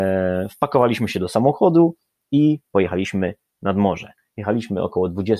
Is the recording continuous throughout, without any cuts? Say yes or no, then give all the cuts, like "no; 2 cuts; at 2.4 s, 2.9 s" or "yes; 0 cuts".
yes; 0 cuts